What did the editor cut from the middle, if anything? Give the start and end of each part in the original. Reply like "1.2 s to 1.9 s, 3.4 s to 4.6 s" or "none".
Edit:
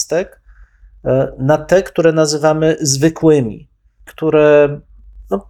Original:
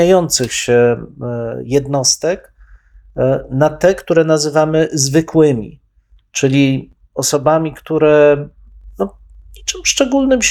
6.2 s to 7.8 s